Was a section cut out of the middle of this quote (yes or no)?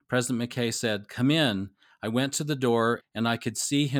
yes